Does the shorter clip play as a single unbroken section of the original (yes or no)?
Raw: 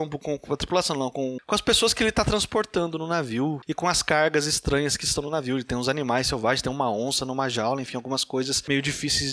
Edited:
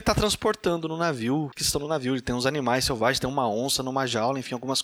no